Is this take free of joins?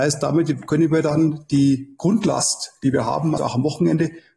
no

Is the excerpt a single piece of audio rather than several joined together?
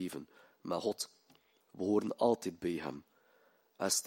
no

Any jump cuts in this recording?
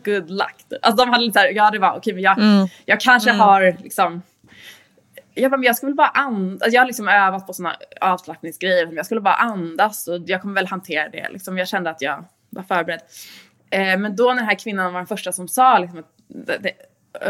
no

